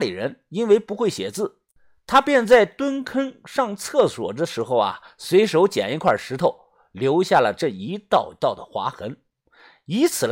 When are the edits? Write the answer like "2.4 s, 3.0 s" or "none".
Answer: none